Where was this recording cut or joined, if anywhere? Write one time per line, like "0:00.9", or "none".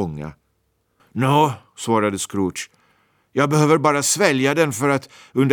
0:01.0